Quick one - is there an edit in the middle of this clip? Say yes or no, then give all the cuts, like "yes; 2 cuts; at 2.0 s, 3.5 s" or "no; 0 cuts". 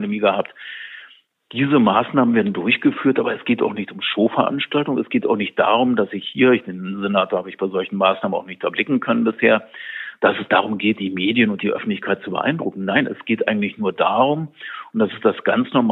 no; 0 cuts